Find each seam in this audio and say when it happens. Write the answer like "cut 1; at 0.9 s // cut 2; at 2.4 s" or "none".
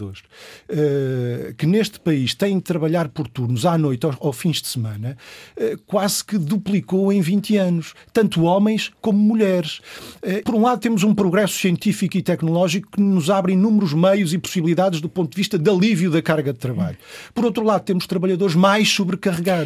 cut 1; at 10.4 s